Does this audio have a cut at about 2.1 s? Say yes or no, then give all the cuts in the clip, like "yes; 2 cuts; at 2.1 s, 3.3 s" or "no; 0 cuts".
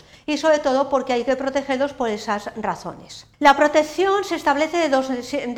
no; 1 cut; at 3.3 s